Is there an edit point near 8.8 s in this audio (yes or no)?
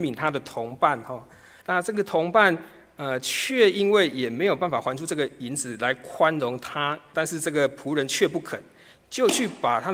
no